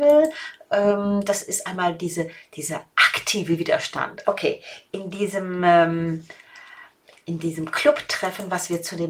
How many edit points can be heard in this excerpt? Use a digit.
1